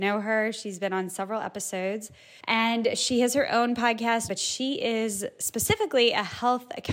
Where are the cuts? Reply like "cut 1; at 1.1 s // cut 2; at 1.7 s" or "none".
cut 1; at 2.4 s // cut 2; at 4.3 s